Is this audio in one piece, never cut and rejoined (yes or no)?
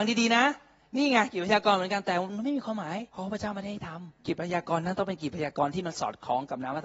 no